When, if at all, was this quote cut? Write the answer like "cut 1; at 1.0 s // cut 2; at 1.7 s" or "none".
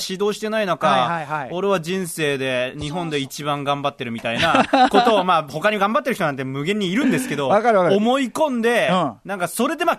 none